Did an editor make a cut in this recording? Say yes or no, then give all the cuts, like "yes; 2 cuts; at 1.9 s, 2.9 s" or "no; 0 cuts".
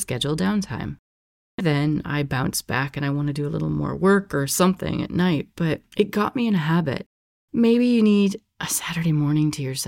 yes; 1 cut; at 1.6 s